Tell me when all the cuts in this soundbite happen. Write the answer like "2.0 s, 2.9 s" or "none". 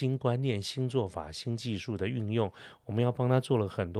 2.8 s